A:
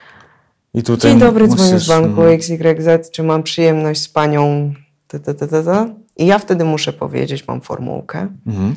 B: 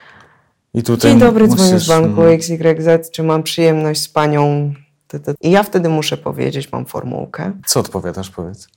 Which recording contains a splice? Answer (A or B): B